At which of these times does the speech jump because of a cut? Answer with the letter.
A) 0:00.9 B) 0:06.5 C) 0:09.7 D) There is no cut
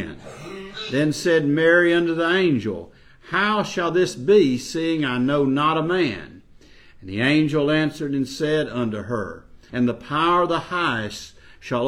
C